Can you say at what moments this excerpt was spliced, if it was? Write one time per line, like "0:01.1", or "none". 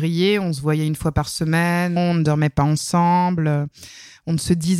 0:02.0